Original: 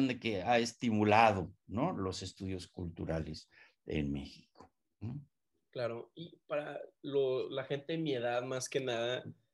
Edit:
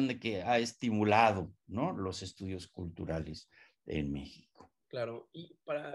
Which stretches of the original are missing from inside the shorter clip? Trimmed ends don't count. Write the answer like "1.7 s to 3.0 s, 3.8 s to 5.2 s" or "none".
4.8 s to 5.6 s